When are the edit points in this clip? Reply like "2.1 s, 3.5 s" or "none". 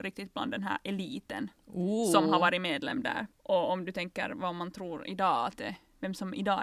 3.3 s